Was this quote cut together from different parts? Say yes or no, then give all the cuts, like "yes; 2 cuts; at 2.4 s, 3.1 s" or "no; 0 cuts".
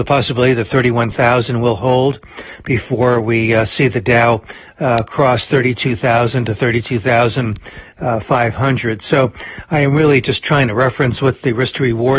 no; 0 cuts